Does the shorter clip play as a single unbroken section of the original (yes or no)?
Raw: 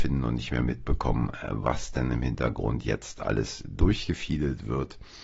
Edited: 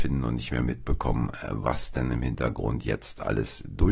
yes